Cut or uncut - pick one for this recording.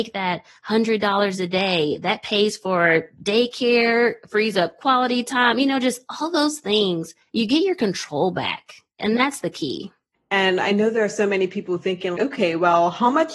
cut